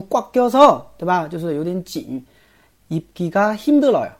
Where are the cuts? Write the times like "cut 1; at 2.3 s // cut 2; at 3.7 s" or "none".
none

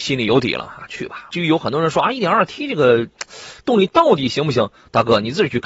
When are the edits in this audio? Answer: cut 1; at 1.3 s

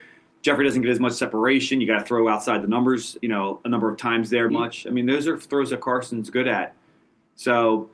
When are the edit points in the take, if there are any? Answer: cut 1; at 3.2 s // cut 2; at 4.5 s

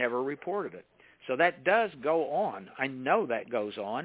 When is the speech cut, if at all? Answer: none

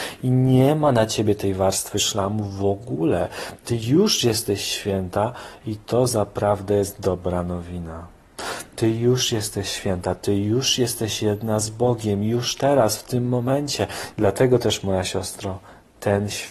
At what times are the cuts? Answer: cut 1; at 14.1 s

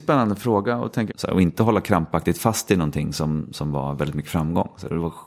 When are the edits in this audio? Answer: cut 1; at 1.1 s

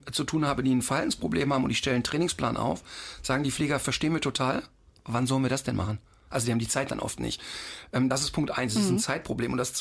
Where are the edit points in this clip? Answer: none

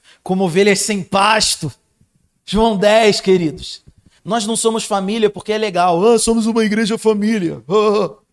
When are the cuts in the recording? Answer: cut 1; at 4.2 s

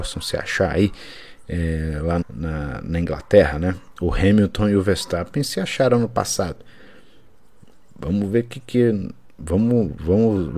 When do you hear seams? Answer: cut 1; at 2.2 s

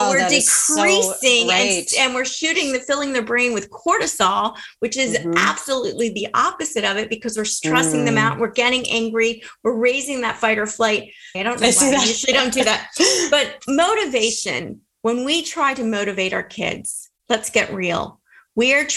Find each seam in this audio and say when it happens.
cut 1; at 11.3 s

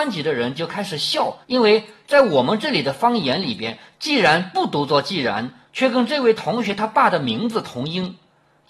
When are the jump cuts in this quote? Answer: cut 1; at 1.4 s

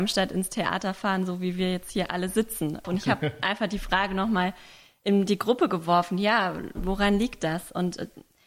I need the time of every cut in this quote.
cut 1; at 2.8 s

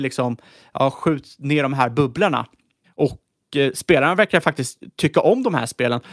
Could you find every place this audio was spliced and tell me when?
cut 1; at 2.8 s

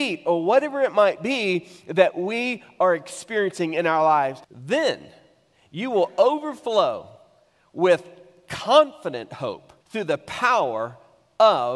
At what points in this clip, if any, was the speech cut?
cut 1; at 4.4 s // cut 2; at 9.8 s

